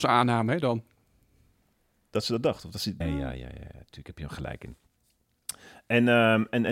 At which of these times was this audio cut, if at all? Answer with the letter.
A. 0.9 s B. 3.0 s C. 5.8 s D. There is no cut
B